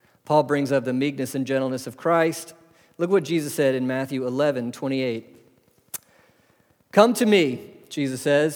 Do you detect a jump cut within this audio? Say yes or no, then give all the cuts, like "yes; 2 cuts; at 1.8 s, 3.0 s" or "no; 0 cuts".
no; 0 cuts